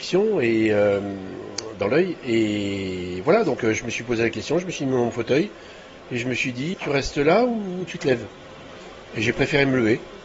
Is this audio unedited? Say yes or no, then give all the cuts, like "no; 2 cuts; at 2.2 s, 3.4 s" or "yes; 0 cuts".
no; 1 cut; at 6.7 s